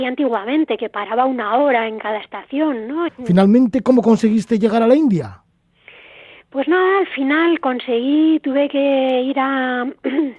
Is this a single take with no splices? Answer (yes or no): no